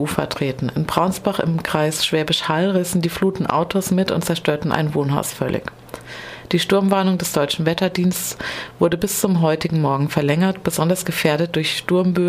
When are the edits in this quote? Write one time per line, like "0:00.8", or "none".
none